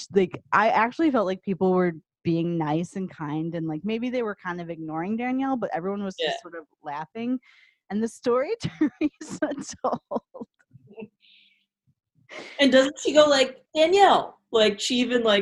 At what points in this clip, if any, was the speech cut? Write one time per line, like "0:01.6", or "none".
none